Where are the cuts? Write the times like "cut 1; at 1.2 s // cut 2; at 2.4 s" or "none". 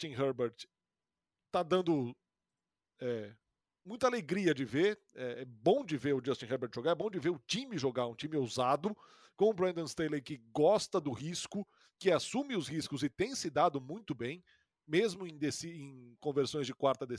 none